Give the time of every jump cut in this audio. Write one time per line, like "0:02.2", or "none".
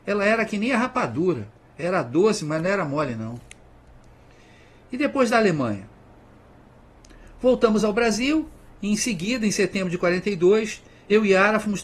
none